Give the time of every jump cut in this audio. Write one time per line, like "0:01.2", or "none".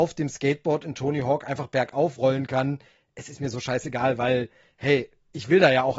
none